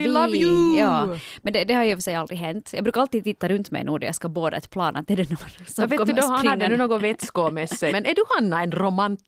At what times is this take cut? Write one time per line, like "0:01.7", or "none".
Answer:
0:07.9